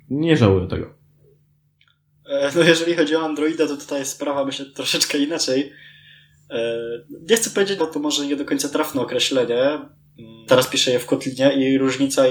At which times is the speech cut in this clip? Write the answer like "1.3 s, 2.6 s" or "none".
7.8 s, 10.5 s